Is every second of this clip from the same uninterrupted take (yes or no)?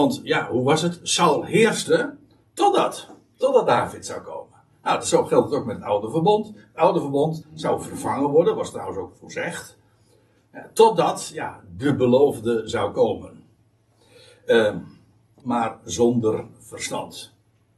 no